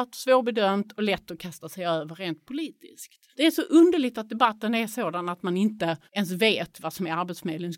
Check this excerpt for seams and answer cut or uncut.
cut